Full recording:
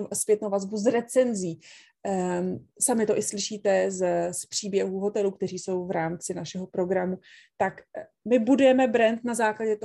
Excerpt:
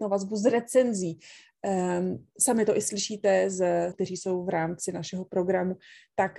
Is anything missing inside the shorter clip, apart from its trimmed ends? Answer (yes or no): yes